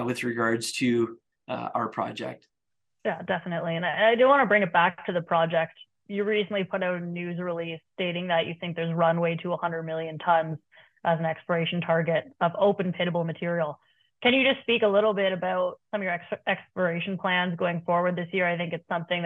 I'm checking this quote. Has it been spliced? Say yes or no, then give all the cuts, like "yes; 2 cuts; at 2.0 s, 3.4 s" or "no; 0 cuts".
no; 0 cuts